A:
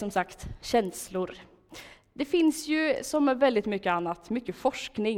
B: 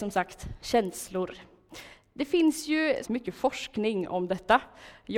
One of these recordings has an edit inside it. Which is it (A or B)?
B